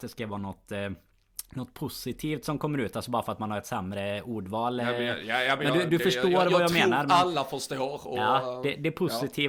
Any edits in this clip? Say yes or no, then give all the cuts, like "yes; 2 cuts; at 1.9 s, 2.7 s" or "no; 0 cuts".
no; 0 cuts